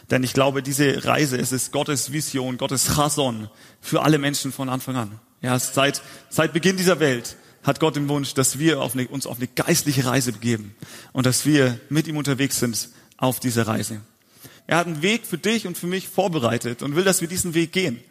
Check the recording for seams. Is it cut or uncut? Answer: cut